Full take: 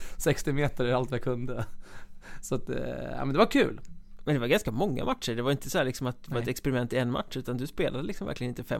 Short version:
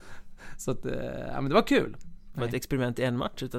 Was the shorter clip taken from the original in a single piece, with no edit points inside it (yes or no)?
no